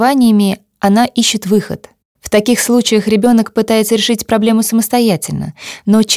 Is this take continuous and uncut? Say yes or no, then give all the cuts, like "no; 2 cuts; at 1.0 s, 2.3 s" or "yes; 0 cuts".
no; 1 cut; at 2.2 s